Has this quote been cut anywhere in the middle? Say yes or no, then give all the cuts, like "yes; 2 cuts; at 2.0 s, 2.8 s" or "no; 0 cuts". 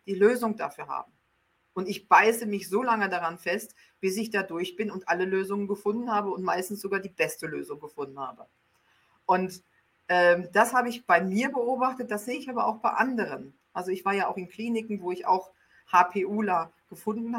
no; 0 cuts